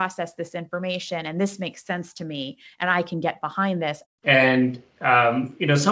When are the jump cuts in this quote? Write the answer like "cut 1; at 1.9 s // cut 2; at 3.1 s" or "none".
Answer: cut 1; at 4.0 s